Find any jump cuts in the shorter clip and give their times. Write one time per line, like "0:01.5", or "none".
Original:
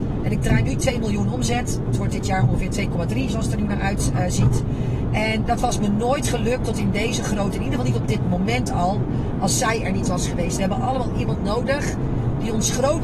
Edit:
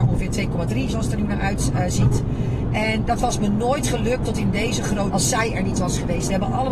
0:05.1